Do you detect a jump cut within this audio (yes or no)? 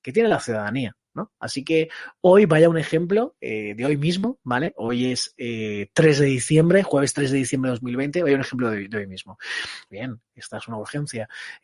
yes